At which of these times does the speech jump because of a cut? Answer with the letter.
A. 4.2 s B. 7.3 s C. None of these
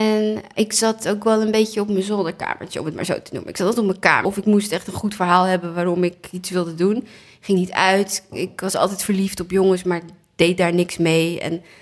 A